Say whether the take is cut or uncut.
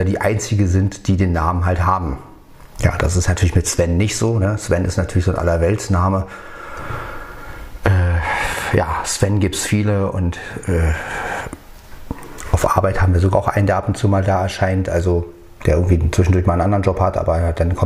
uncut